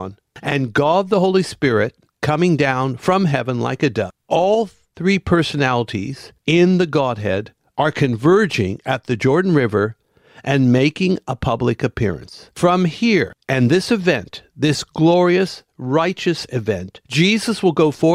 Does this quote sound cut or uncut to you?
cut